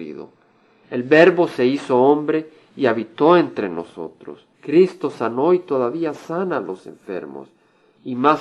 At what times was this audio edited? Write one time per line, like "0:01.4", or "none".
0:04.5